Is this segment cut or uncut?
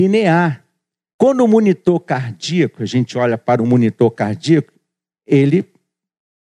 cut